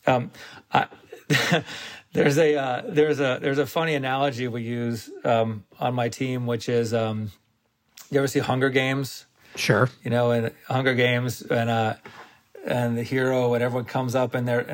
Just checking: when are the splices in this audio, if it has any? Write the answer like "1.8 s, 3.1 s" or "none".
none